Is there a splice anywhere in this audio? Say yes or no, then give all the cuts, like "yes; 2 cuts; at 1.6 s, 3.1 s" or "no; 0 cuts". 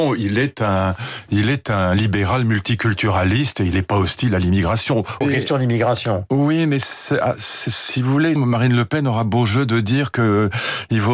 yes; 2 cuts; at 5.2 s, 8.4 s